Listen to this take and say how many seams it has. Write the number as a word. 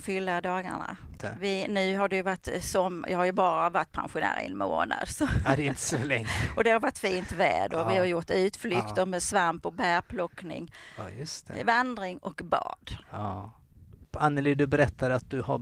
two